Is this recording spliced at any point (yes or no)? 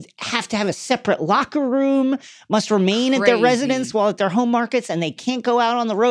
no